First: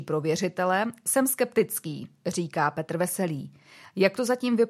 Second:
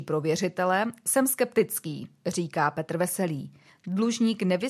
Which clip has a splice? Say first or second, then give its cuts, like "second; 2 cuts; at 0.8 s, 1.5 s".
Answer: second; 1 cut; at 3.7 s